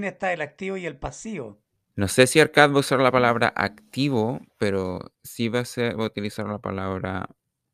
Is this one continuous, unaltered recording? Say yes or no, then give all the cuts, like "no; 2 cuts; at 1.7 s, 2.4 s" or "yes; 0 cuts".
no; 2 cuts; at 1.9 s, 5.1 s